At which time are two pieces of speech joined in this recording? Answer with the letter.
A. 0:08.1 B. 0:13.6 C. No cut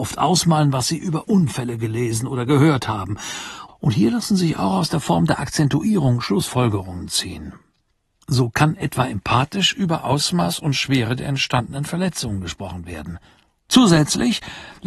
B